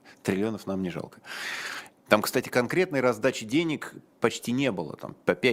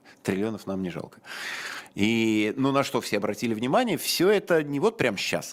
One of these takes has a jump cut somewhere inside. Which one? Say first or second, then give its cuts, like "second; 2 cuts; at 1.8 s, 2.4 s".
first; 1 cut; at 1.9 s